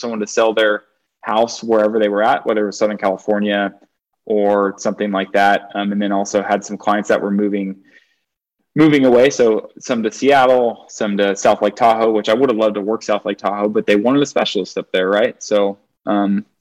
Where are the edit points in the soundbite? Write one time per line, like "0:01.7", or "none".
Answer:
none